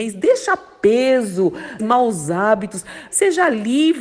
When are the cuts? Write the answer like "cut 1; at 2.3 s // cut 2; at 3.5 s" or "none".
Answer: cut 1; at 1.8 s // cut 2; at 3.1 s